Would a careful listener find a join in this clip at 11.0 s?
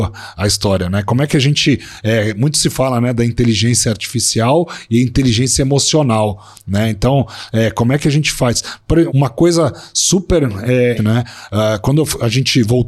yes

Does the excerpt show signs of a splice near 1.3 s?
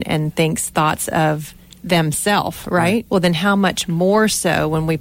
no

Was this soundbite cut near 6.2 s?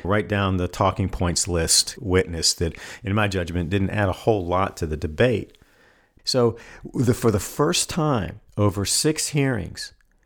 yes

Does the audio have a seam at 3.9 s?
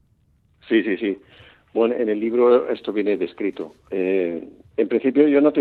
yes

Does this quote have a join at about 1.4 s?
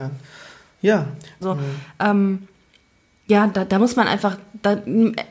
yes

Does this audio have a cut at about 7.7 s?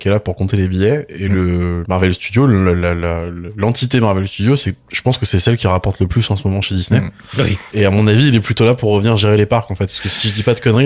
no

